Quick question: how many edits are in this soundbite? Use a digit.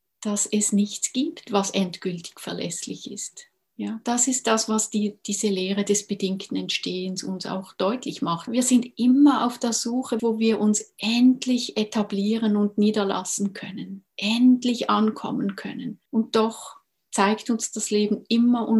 3